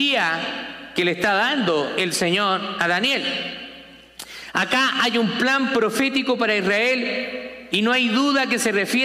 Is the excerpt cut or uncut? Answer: uncut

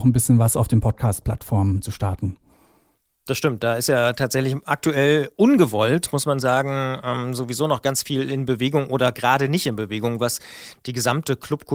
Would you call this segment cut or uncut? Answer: uncut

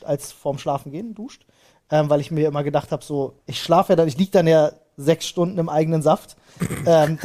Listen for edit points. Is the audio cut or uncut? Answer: cut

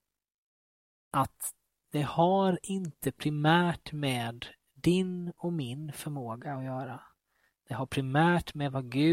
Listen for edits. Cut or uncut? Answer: uncut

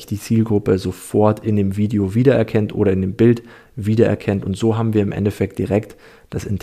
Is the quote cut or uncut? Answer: uncut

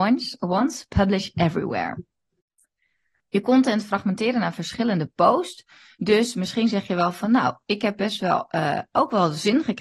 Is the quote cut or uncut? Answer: uncut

